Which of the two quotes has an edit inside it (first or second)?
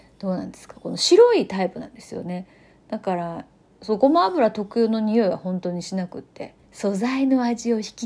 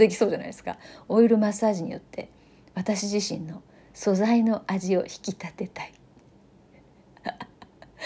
first